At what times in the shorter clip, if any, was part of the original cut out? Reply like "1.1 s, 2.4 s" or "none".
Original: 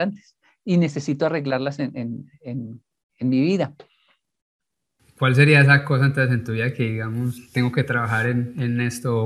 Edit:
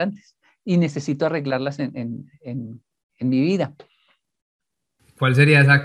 none